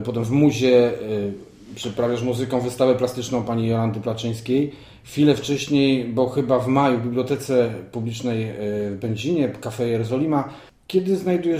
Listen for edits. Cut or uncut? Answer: uncut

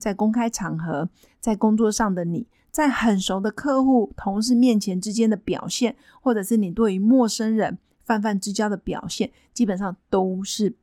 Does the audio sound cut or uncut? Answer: uncut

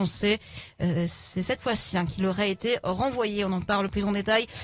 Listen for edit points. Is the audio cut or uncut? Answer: uncut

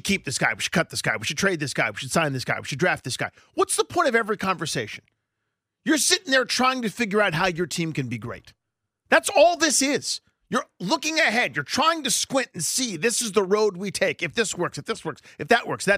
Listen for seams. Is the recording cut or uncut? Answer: uncut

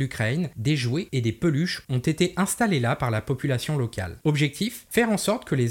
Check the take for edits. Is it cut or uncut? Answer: uncut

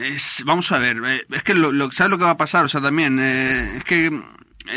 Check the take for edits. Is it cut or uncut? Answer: uncut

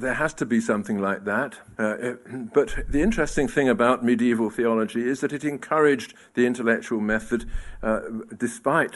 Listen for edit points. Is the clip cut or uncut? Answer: cut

